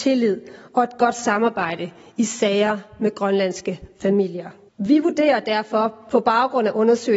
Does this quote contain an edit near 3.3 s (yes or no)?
no